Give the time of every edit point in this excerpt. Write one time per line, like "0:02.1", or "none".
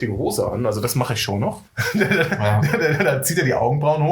0:01.7